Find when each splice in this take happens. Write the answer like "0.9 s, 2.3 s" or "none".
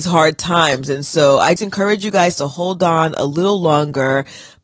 1.6 s